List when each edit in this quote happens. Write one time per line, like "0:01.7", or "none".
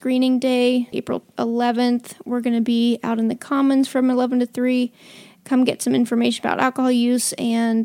0:00.9